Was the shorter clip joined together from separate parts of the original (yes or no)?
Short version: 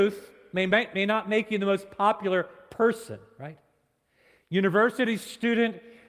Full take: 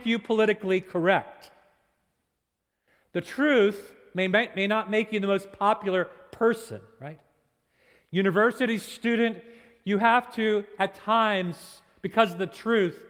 no